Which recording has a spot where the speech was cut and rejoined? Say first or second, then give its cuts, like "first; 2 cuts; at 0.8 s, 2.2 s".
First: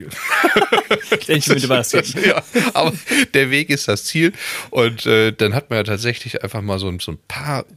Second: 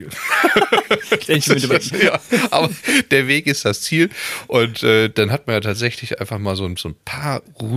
second; 1 cut; at 1.7 s